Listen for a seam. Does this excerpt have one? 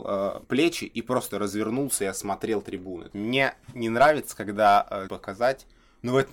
yes; 2 cuts; at 3.1 s, 5.1 s

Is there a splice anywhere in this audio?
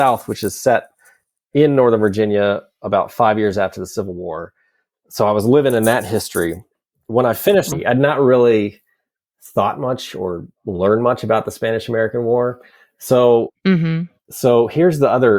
yes; 2 cuts; at 7.7 s, 14.3 s

